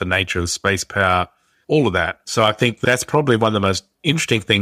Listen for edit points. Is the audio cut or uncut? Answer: cut